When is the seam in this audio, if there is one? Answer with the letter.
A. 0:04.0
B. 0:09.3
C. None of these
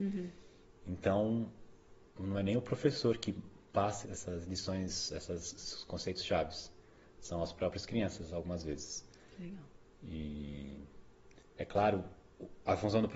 A